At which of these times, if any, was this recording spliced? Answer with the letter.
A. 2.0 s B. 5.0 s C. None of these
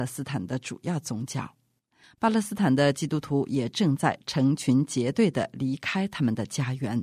A